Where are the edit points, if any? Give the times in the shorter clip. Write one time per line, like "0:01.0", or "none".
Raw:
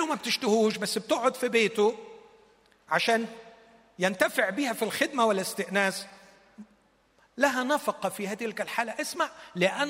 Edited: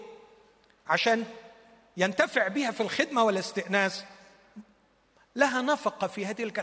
none